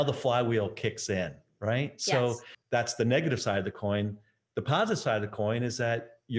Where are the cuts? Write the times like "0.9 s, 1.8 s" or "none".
2.6 s